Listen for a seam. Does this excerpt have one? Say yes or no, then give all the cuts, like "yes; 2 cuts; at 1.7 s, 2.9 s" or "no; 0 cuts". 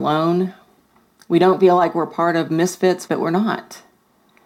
yes; 1 cut; at 3.1 s